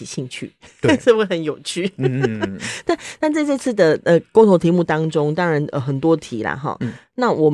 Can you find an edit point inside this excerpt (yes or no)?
no